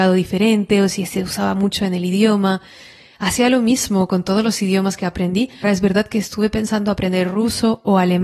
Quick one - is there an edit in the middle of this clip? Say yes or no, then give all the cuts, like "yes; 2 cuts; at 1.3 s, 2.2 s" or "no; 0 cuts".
yes; 1 cut; at 5.6 s